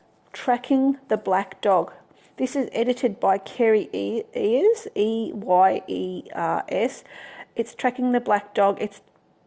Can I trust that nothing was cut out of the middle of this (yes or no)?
yes